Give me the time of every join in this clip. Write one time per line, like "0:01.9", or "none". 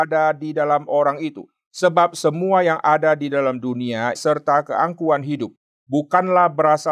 0:04.1